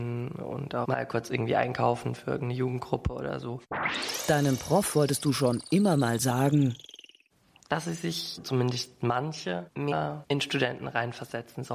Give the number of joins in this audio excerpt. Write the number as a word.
zero